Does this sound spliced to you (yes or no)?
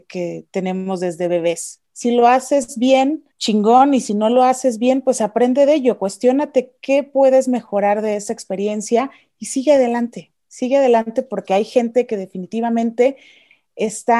yes